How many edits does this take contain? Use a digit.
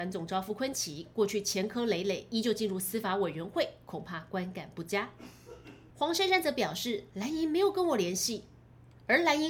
1